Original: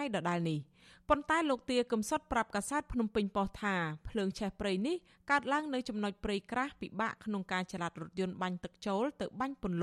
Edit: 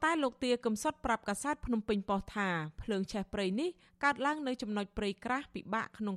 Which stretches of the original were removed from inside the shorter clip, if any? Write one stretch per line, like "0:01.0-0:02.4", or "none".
none